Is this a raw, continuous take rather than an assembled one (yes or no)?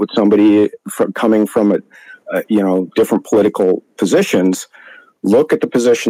yes